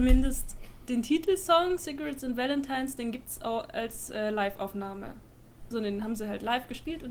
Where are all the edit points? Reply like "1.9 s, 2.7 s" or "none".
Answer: 5.7 s